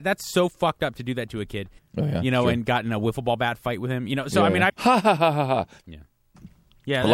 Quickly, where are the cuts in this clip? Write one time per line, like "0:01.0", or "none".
0:01.8
0:04.7